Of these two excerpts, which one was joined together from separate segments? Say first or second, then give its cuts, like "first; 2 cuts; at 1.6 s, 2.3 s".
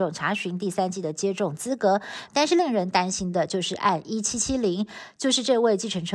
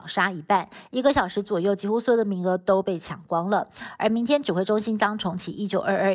first; 2 cuts; at 2.3 s, 4.3 s